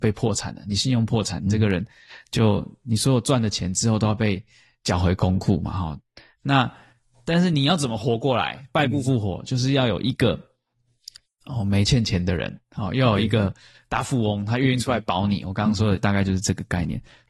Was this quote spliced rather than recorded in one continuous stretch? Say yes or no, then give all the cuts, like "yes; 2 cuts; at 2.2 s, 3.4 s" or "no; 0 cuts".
no; 0 cuts